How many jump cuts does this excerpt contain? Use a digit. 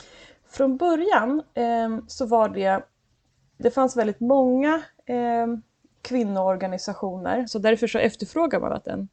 2